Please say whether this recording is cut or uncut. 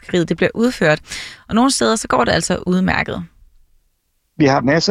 uncut